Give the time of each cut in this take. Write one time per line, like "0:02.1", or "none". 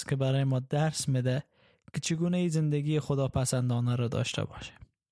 none